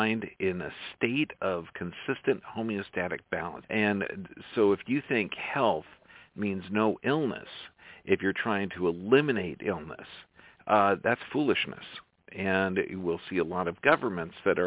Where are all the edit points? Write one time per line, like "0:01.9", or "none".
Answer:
0:03.6